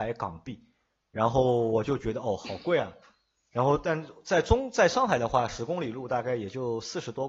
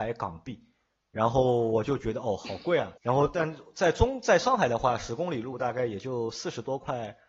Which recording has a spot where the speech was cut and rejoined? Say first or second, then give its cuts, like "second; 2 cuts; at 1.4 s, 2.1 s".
second; 1 cut; at 3.0 s